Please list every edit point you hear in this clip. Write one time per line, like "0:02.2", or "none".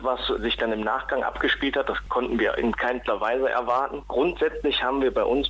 none